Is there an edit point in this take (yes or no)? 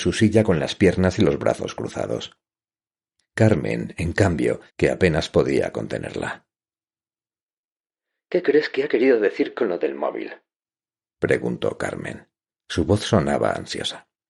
yes